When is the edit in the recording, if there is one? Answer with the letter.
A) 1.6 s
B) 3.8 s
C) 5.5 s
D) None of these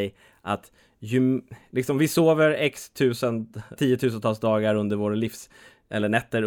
B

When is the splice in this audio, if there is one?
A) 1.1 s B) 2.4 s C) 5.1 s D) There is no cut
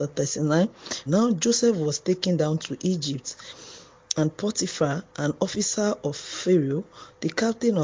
A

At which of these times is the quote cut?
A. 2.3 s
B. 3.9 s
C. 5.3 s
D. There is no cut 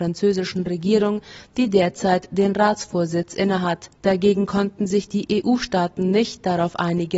B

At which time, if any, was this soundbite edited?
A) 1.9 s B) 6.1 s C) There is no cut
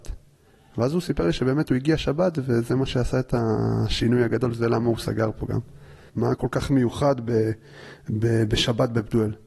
B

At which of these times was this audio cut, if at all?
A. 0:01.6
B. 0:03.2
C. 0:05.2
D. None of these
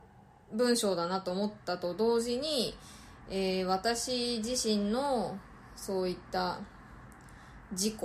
D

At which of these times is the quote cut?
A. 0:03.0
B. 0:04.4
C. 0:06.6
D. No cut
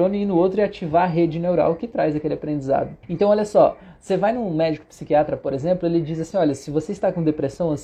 A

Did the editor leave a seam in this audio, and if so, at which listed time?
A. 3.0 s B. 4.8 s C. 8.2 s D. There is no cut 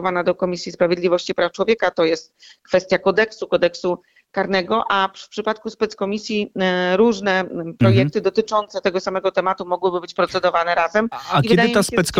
D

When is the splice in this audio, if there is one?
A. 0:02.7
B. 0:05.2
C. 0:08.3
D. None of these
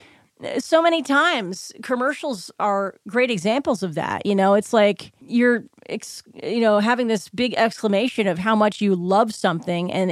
B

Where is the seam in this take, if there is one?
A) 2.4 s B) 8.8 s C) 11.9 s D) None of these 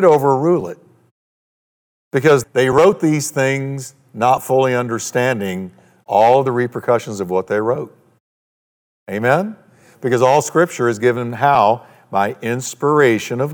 A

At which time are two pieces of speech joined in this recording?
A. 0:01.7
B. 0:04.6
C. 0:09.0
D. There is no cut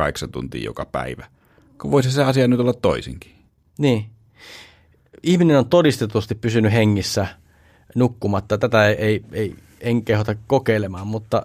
D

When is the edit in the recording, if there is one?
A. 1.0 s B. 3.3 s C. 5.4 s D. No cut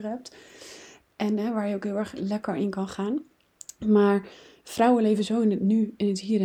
D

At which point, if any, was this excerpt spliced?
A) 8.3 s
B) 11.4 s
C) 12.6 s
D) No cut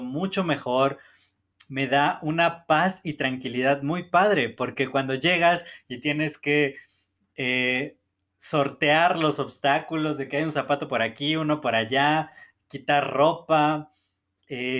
D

